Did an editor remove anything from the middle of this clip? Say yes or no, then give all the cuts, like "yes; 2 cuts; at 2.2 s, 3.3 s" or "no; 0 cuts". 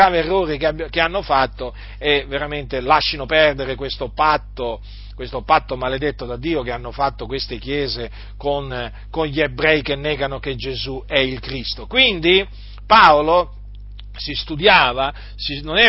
no; 0 cuts